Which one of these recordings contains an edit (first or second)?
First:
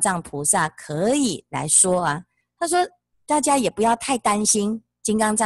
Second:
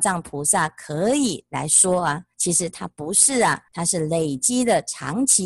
second